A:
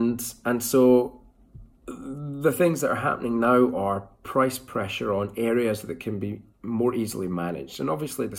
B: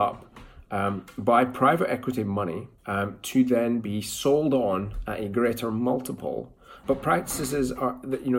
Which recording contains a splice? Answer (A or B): B